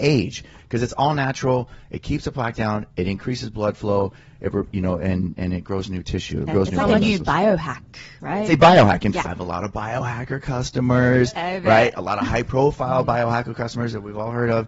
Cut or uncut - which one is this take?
cut